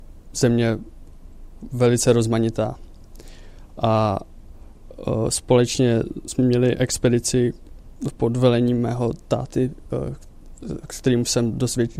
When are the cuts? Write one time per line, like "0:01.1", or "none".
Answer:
none